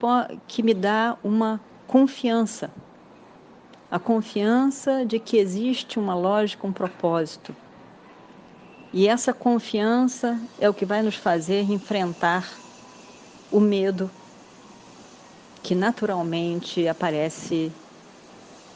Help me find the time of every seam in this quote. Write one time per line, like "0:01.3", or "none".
none